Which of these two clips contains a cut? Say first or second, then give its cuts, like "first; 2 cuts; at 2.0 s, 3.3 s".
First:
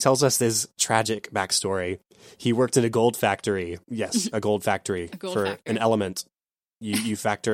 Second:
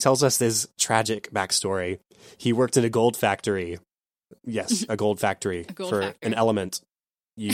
first; 1 cut; at 3.8 s